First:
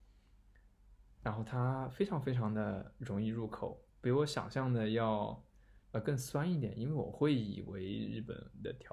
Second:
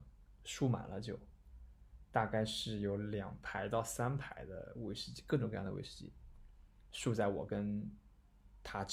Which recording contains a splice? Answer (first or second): first